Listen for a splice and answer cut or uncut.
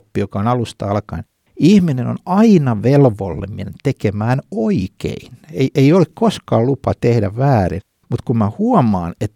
uncut